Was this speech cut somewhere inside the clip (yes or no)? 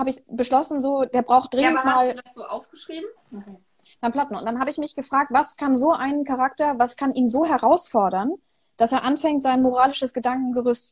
yes